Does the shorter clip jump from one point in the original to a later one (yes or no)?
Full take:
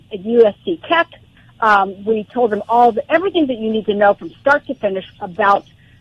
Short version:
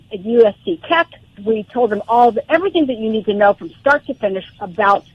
yes